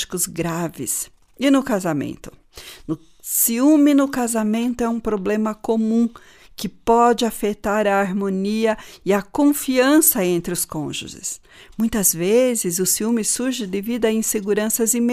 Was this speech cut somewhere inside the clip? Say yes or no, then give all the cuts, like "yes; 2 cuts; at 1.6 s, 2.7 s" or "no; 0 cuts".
no; 0 cuts